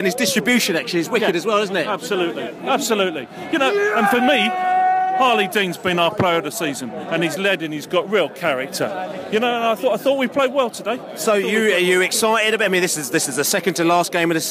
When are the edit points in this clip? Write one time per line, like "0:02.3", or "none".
none